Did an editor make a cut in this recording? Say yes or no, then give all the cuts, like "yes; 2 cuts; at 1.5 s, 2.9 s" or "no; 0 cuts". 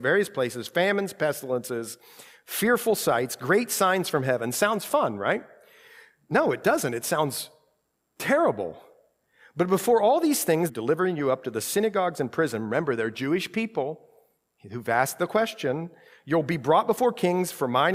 yes; 1 cut; at 10.7 s